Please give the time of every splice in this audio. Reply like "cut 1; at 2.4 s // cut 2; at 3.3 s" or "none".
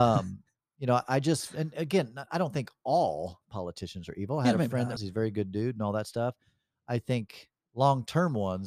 cut 1; at 5.0 s